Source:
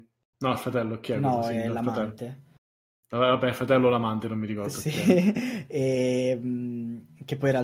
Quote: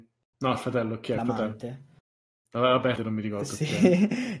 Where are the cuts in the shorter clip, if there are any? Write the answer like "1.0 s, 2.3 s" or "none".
1.2 s, 3.0 s